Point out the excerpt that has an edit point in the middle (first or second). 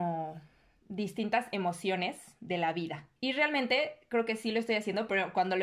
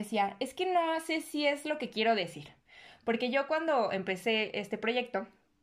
first